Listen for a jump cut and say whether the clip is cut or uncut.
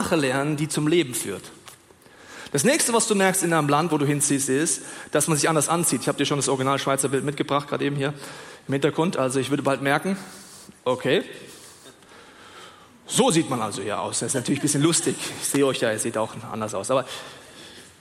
uncut